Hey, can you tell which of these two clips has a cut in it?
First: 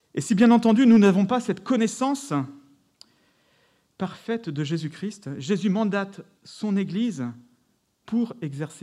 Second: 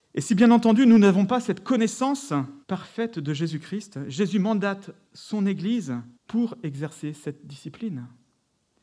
second; 2 cuts; at 2.6 s, 6.2 s

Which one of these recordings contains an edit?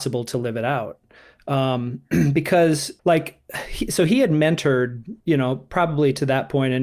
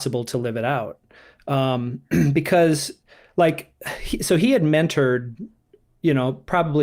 first; 2 cuts; at 3.0 s, 5.2 s

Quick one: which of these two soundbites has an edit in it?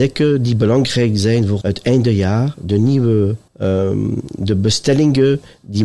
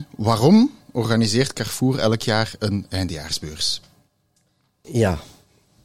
first; 2 cuts; at 1.6 s, 3.5 s

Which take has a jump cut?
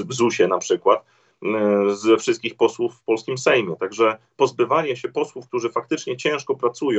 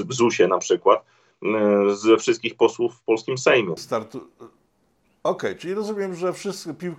second; 1 cut; at 3.8 s

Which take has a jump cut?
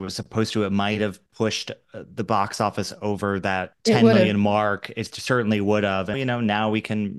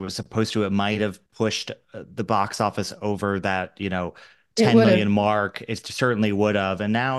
first; 2 cuts; at 3.7 s, 6.1 s

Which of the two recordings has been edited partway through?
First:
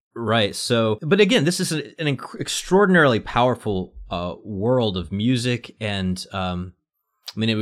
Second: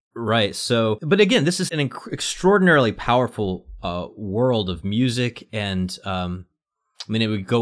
second; 1 cut; at 1.7 s

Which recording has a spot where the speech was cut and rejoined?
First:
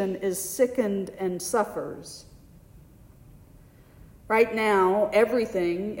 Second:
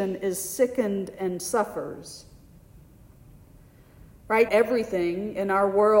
second; 1 cut; at 4.5 s

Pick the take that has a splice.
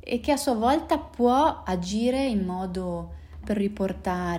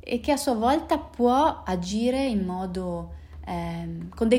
first; 1 cut; at 3.4 s

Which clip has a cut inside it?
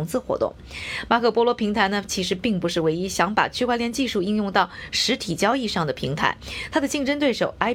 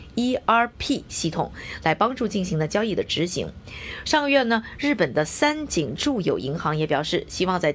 second; 1 cut; at 4.0 s

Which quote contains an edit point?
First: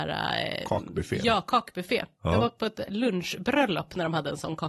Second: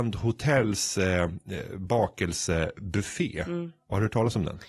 first; 1 cut; at 2.9 s

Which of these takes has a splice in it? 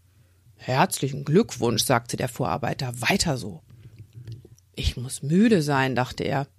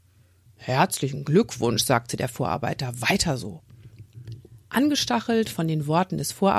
first; 1 cut; at 4.5 s

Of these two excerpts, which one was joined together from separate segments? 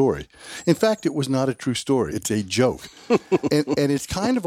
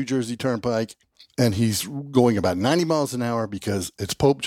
first; 1 cut; at 2.1 s

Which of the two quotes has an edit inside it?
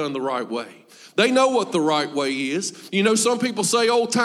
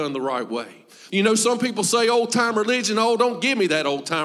second; 1 cut; at 1.1 s

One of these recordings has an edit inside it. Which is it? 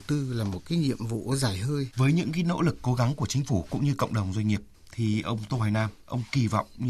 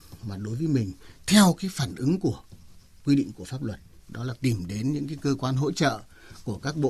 first; 1 cut; at 1.9 s

